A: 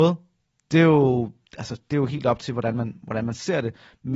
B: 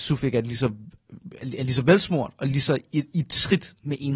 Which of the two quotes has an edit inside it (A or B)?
B